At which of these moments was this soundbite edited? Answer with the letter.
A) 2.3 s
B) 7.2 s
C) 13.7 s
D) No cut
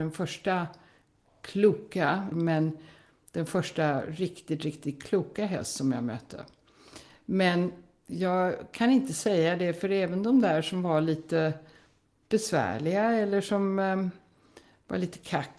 A